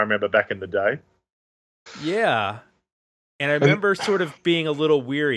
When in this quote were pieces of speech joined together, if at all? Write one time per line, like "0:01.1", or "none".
none

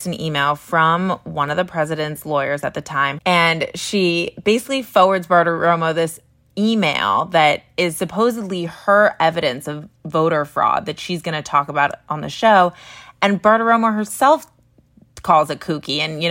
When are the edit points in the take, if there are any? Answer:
0:03.2

